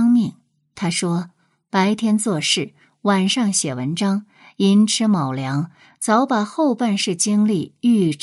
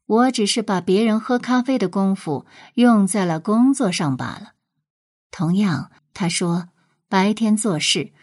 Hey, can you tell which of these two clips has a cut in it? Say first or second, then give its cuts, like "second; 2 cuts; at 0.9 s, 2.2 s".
second; 1 cut; at 6.0 s